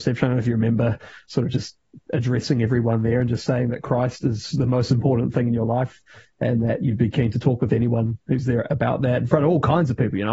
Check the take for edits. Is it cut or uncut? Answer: uncut